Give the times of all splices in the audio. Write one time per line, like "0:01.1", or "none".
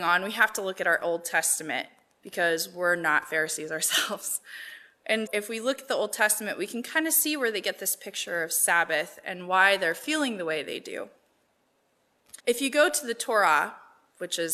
0:05.3
0:12.4